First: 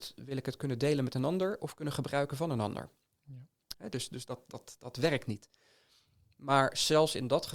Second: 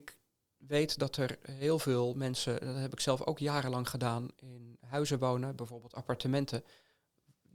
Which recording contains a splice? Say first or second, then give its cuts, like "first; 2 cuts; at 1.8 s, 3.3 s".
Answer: first; 1 cut; at 3.7 s